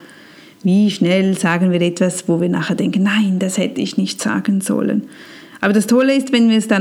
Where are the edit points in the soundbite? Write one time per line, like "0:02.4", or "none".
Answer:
none